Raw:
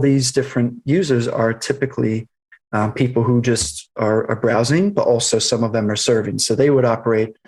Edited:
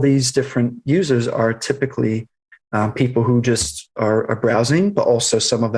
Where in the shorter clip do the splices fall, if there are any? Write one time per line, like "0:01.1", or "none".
none